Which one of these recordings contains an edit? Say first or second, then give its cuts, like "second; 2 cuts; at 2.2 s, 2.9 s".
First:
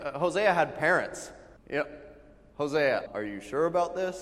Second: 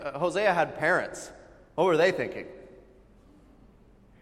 first; 2 cuts; at 1.6 s, 3.1 s